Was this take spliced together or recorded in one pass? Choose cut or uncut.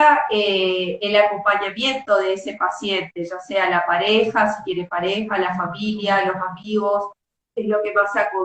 uncut